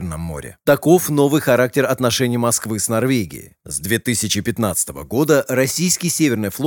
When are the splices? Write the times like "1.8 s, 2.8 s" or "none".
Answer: 3.6 s